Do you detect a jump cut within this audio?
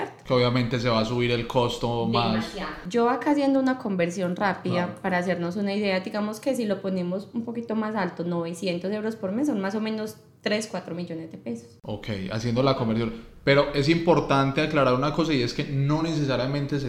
no; 0 cuts

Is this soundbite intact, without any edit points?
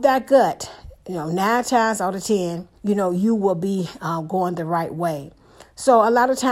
no; 1 cut; at 2.8 s

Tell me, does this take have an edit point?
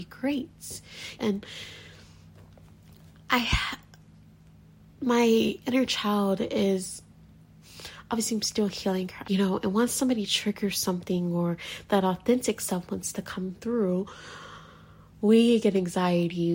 yes; 2 cuts; at 1.2 s, 9.2 s

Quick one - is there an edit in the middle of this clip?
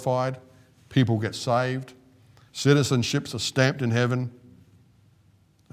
yes; 1 cut; at 2.5 s

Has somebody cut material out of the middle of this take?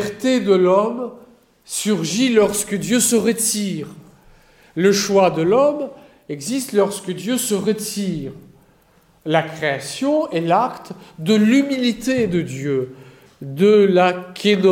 no; 0 cuts

